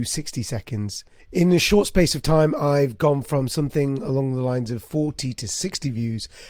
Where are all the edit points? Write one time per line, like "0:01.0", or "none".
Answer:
0:01.2